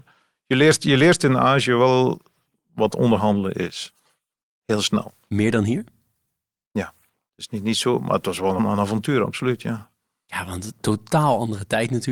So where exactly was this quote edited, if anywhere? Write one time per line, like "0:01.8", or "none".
0:07.3
0:08.6